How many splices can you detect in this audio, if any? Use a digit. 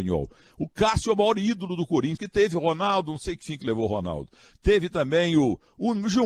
1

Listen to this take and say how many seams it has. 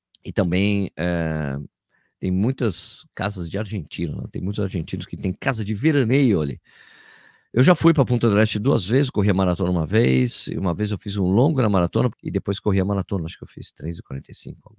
1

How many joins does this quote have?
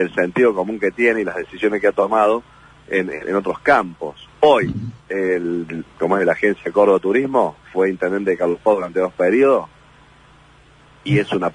3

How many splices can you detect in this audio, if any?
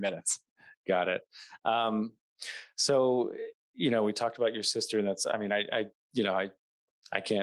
0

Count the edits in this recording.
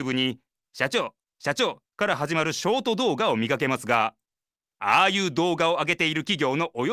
0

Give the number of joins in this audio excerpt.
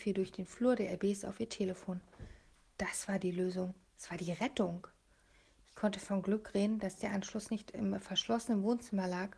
0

